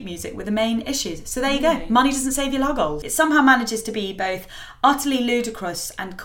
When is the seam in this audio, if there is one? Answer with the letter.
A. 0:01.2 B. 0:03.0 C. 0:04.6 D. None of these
B